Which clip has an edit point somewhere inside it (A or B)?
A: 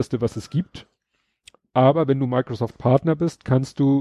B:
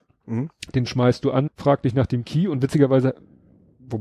B